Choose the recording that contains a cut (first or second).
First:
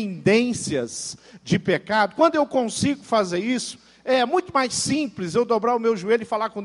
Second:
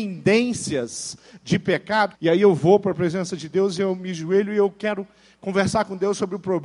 second